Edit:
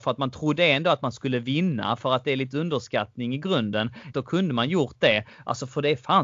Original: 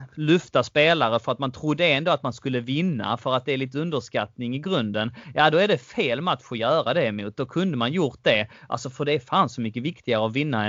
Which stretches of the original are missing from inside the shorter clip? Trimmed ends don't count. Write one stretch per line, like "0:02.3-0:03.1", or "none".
0:05.3-0:07.4